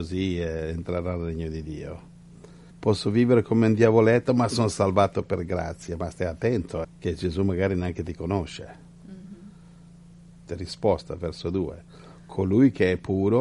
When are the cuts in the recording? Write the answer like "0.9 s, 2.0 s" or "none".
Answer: 2.7 s, 6.8 s, 10.5 s